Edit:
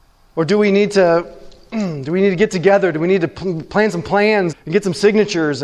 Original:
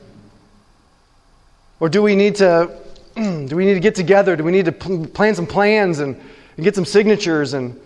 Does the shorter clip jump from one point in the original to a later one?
yes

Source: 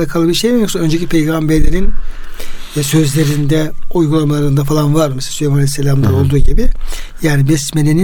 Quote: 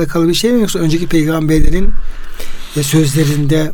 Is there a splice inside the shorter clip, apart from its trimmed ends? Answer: no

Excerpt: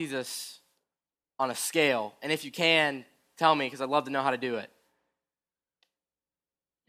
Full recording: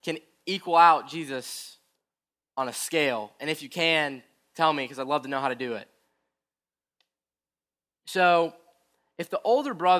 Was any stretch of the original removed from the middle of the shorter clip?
no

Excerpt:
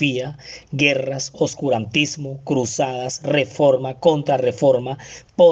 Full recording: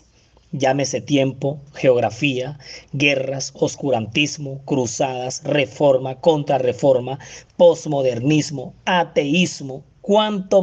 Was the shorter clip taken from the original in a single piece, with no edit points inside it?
yes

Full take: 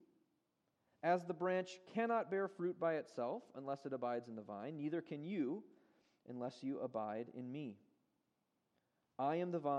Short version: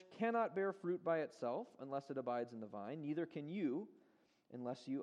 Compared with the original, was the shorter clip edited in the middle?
no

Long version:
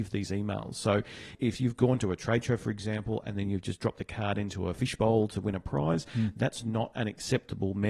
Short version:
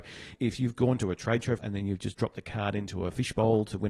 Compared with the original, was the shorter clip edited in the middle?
yes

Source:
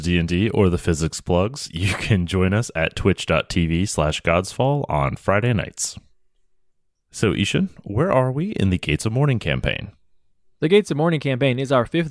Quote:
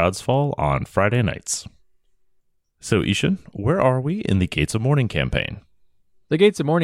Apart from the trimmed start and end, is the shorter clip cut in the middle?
no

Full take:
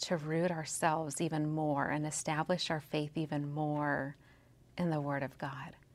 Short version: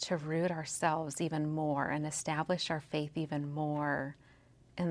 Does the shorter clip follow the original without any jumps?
yes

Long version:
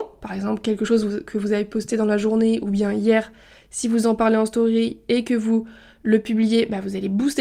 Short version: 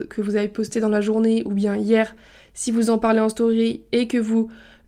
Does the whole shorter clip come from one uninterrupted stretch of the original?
yes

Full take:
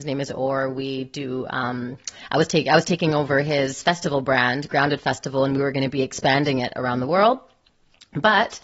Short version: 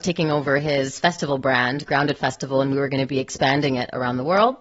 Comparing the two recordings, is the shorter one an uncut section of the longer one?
yes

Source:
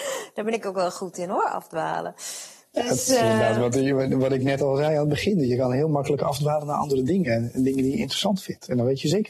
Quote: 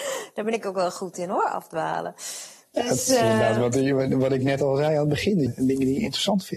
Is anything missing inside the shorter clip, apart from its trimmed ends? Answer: yes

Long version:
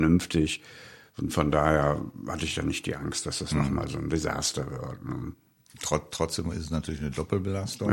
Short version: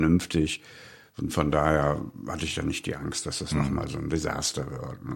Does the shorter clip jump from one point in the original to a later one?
no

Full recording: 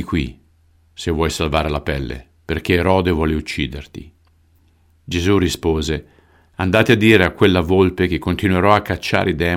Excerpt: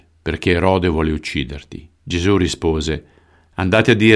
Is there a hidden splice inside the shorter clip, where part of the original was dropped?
yes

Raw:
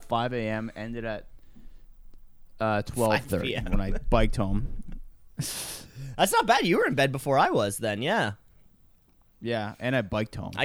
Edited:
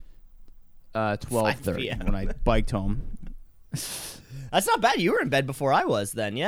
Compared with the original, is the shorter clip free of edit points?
yes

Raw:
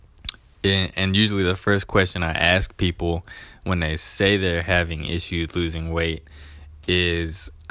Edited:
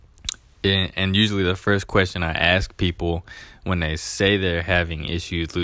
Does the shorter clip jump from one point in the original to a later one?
no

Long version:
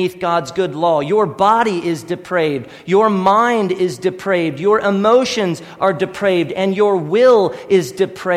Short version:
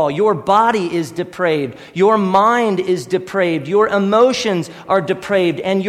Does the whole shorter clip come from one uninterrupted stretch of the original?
yes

